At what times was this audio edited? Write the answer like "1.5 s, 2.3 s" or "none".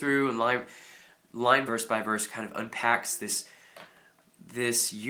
1.7 s